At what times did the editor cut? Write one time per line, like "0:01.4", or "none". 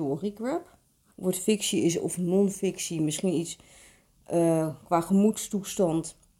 0:01.1